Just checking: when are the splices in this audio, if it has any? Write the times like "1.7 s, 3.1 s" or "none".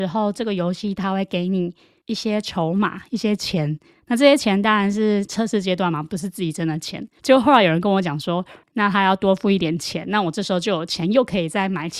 7.2 s, 8.6 s